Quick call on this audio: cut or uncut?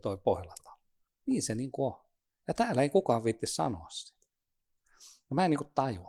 cut